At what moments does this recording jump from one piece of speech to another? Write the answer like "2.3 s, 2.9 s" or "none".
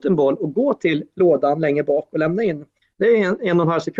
none